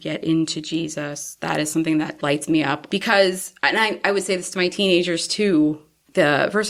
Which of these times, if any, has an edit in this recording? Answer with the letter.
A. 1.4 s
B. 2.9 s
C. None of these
B